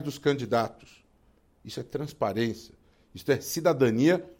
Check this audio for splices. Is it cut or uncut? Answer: uncut